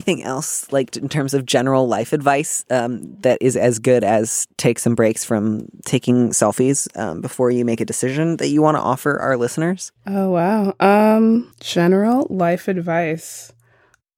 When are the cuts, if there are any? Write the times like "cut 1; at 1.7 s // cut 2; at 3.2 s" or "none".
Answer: cut 1; at 0.9 s // cut 2; at 11.5 s